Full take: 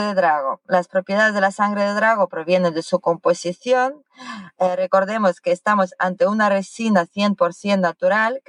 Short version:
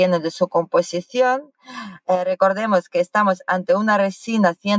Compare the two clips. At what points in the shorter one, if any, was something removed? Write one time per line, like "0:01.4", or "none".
none